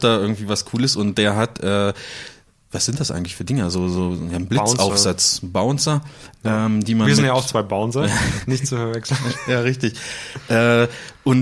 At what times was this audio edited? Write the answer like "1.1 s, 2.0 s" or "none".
none